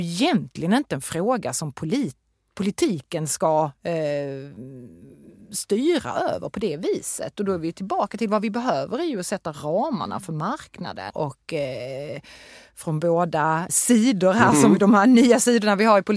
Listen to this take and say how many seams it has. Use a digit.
2